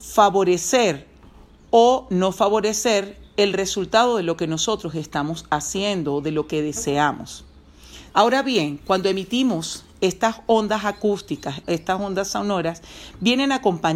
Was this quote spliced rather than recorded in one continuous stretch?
yes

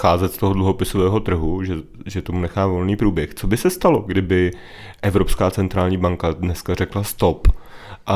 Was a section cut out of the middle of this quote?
no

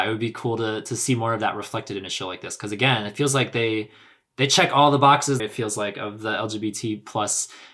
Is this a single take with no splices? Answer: no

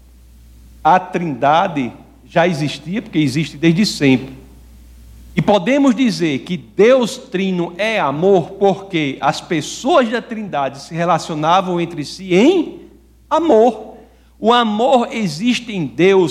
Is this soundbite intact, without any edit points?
yes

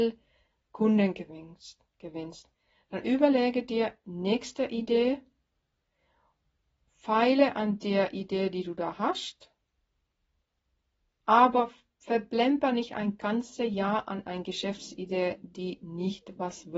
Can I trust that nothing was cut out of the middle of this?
yes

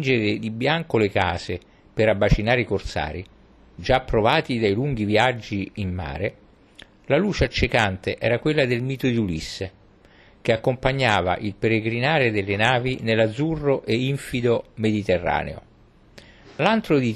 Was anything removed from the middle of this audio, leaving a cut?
no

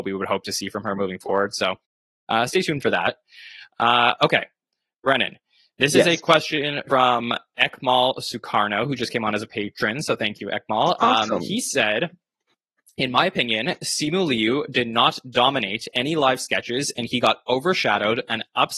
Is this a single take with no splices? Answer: yes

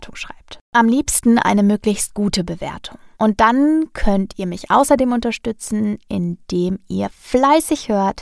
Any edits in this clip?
yes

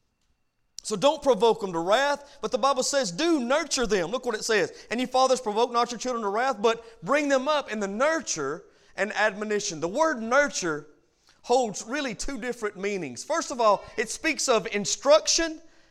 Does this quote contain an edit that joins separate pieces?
no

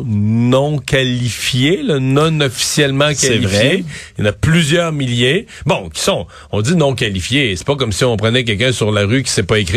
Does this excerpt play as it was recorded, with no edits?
yes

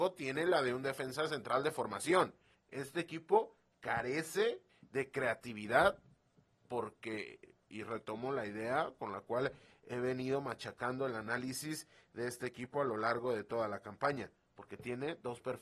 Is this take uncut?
no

